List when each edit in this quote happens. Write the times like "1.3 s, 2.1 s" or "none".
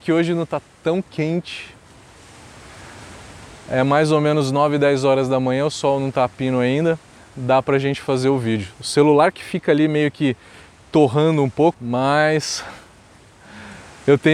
11.7 s